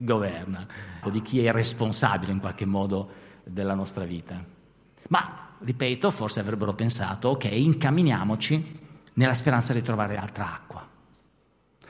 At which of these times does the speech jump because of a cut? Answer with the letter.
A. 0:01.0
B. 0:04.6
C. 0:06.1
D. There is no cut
A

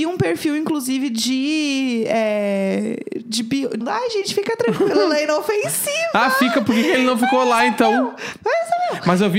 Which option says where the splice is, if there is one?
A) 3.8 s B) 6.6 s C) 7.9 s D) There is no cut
A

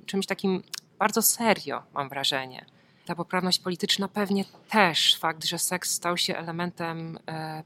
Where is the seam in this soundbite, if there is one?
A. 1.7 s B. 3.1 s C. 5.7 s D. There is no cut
B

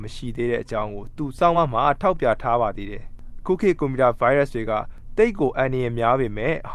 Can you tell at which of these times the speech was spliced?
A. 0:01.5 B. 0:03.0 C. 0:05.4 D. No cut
D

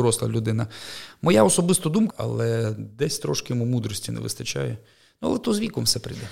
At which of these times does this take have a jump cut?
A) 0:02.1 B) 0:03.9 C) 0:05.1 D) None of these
A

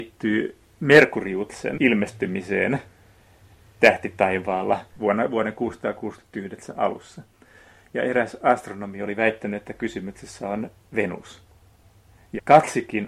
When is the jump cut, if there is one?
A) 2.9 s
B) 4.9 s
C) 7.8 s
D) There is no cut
D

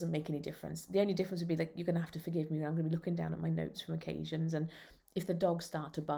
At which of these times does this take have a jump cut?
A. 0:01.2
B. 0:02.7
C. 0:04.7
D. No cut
D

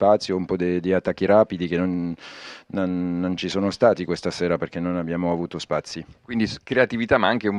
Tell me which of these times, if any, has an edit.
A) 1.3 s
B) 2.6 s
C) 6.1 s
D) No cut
D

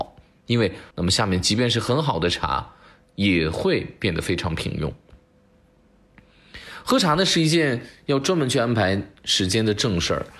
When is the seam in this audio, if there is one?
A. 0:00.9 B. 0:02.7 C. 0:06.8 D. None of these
A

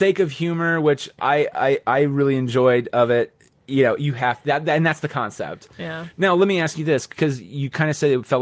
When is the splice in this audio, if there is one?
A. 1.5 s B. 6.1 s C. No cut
C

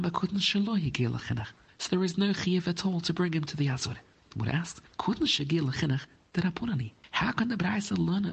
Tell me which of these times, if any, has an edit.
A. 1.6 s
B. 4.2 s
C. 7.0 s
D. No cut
D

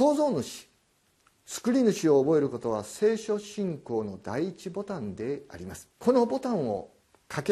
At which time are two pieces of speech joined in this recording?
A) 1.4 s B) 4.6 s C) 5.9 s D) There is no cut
C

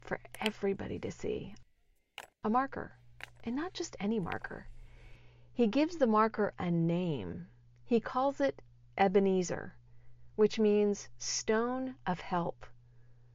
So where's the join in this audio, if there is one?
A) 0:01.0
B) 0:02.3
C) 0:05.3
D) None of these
B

